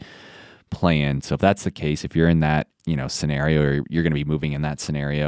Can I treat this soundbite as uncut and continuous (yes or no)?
no